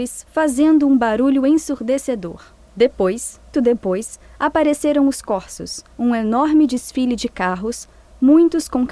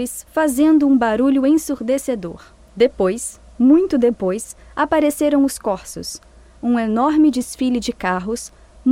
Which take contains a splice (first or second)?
first